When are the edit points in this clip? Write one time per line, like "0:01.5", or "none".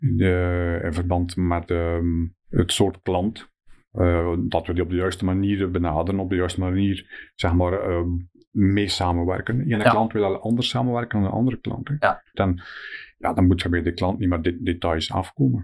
0:02.4
0:12.3